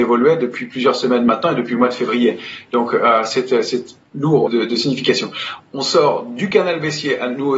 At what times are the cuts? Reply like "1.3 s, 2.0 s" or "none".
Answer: 4.5 s, 5.6 s